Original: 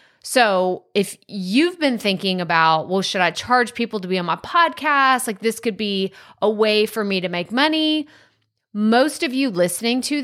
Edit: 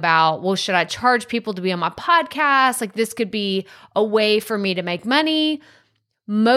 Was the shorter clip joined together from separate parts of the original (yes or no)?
no